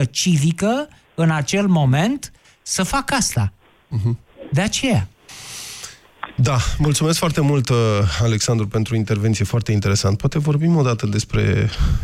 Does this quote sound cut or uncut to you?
uncut